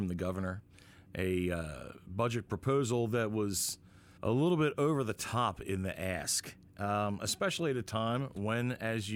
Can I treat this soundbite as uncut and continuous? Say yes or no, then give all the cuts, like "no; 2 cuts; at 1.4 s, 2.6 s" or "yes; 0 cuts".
yes; 0 cuts